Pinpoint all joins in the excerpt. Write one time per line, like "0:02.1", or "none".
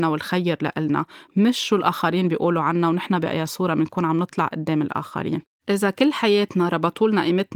0:05.6